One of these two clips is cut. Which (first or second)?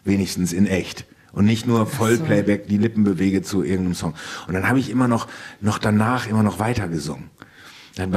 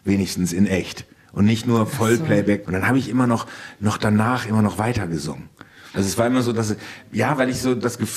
second